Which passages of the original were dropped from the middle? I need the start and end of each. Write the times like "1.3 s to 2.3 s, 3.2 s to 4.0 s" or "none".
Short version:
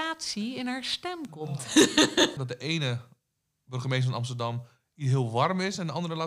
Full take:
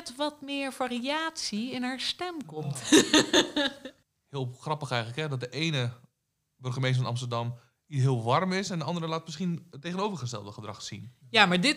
3.5 s to 5.3 s